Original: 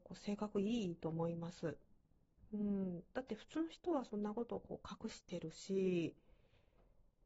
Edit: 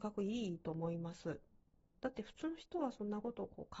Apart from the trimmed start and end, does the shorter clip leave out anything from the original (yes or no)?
yes